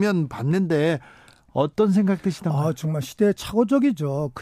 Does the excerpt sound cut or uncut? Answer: uncut